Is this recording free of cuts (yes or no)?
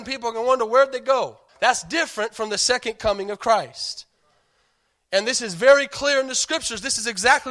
no